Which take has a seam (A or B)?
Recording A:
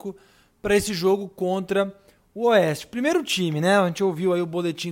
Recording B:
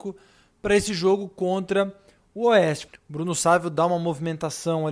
B